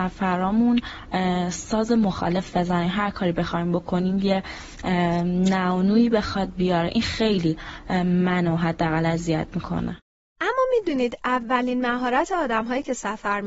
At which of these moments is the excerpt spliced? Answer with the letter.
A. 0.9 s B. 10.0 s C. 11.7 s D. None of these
D